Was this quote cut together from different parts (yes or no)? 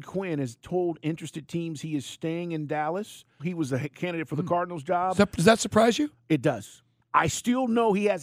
yes